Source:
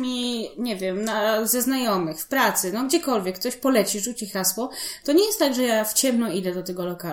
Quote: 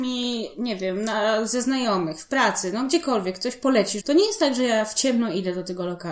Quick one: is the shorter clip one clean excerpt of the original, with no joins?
no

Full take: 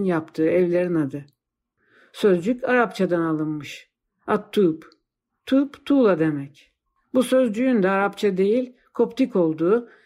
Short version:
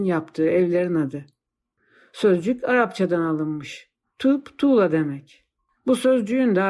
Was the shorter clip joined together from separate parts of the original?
yes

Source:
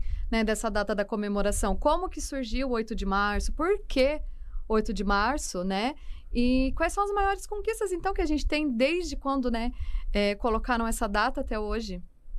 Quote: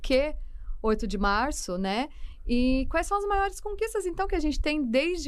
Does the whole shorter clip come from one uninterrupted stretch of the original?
yes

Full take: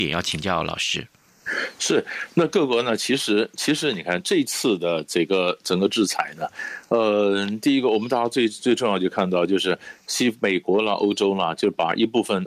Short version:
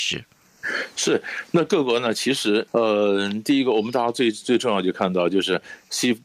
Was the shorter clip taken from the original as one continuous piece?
no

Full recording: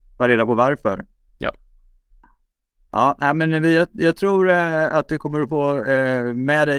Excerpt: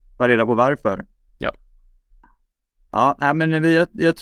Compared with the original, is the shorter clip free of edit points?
yes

